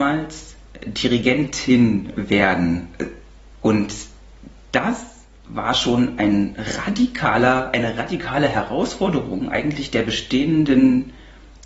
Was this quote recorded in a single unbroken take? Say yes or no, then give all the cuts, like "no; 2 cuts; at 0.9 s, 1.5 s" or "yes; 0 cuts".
yes; 0 cuts